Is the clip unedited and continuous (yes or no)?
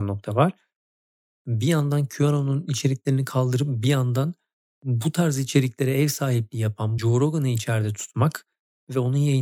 no